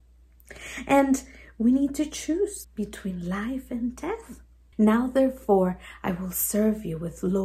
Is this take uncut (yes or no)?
no